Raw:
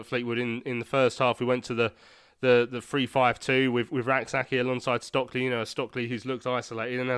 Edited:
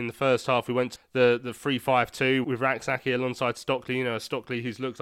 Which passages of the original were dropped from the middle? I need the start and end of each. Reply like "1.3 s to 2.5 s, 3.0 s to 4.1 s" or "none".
1.7 s to 2.2 s, 3.7 s to 3.9 s